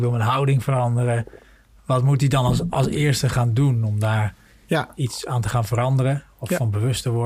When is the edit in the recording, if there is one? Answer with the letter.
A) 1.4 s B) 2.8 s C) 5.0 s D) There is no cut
D